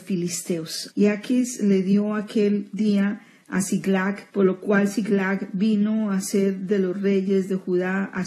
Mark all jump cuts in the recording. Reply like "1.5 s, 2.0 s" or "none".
0.9 s, 4.3 s

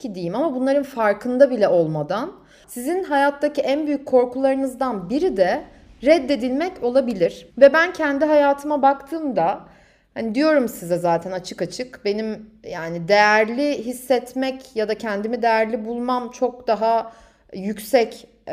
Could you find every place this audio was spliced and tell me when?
2.6 s, 7.5 s

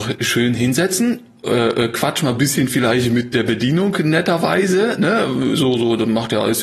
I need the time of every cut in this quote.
none

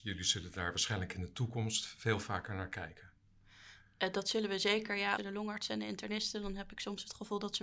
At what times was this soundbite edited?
5.2 s

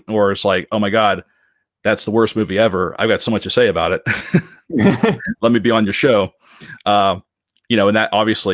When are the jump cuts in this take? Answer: none

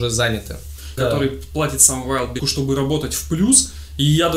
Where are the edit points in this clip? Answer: 1.0 s, 2.4 s

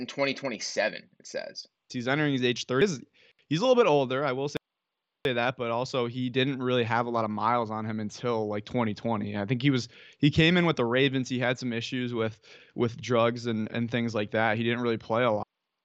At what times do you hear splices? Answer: 1.9 s

